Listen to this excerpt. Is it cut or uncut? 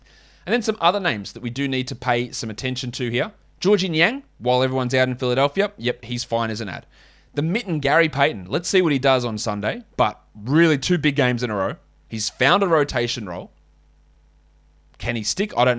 uncut